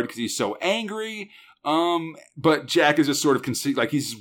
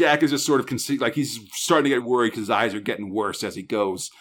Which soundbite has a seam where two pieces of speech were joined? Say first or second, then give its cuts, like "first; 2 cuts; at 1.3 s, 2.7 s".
second; 1 cut; at 2.0 s